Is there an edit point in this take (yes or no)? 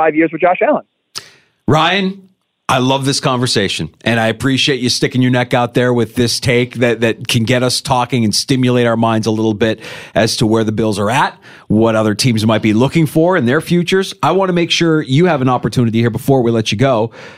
no